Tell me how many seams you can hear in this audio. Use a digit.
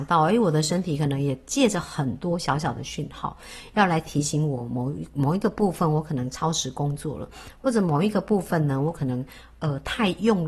0